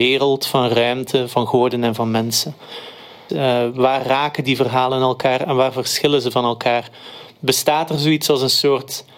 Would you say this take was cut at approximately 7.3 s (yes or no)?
no